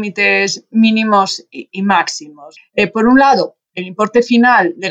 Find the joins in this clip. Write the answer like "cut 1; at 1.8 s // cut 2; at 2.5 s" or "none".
cut 1; at 2.6 s